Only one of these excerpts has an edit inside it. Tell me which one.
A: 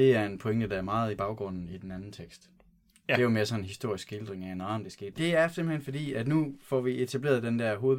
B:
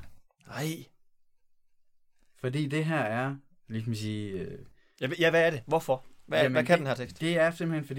A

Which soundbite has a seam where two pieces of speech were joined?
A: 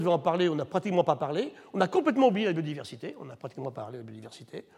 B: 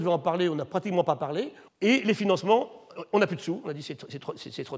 B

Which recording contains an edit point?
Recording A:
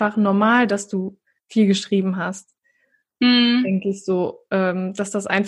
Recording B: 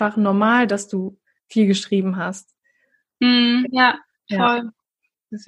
B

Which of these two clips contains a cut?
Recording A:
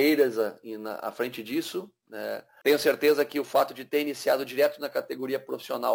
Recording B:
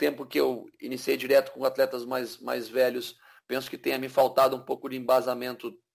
A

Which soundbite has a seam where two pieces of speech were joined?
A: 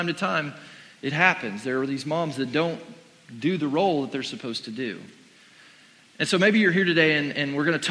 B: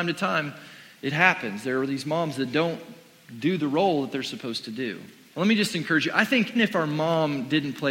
B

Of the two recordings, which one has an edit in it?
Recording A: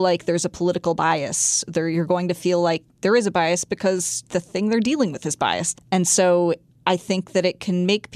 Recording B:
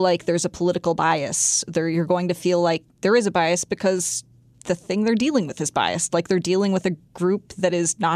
A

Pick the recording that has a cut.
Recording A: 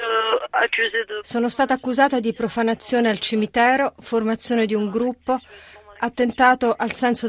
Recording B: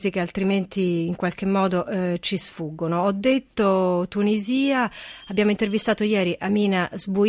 A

